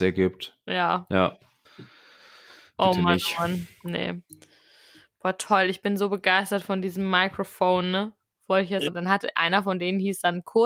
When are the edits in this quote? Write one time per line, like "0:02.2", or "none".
0:01.7
0:08.9